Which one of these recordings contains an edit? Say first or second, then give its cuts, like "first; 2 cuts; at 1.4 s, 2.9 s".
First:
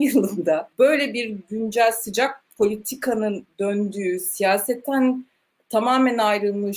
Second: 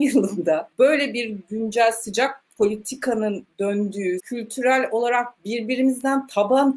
second; 1 cut; at 4.2 s